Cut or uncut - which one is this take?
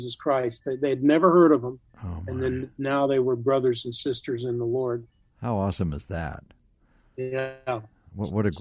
uncut